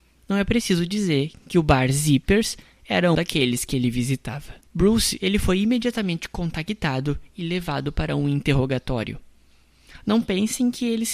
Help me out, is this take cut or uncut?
cut